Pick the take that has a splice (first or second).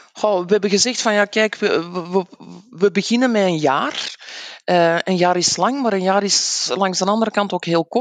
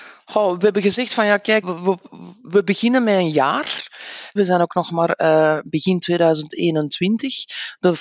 second